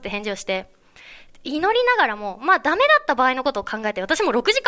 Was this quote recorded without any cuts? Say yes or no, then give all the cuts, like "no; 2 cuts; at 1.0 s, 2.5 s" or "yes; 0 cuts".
yes; 0 cuts